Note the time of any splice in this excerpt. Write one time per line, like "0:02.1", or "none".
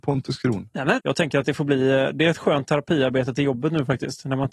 0:01.0